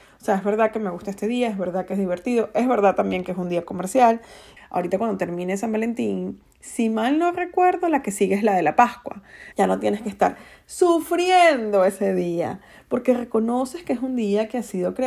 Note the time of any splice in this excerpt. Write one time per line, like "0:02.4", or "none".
0:04.6
0:09.5